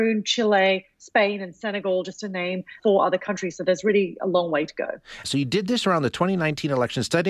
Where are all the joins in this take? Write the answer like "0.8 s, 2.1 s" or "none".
2.8 s, 5.2 s